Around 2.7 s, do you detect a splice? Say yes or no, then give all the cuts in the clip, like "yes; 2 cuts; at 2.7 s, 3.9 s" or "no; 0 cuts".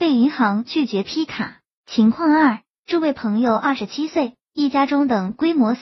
yes; 1 cut; at 2.7 s